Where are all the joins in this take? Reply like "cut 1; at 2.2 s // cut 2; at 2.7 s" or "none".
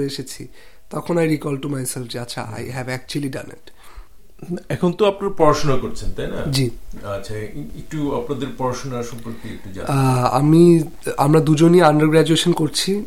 none

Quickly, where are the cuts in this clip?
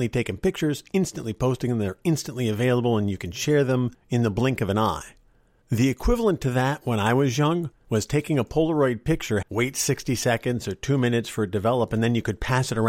cut 1; at 9.4 s

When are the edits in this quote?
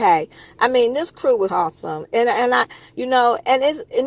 cut 1; at 1.5 s

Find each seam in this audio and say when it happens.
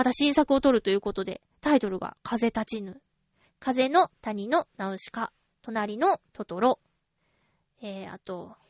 cut 1; at 3.4 s

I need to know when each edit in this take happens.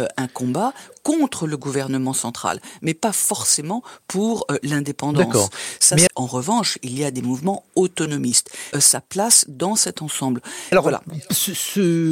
cut 1; at 6.1 s // cut 2; at 8.7 s // cut 3; at 10.7 s

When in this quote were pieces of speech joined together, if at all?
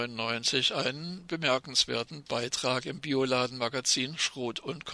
none

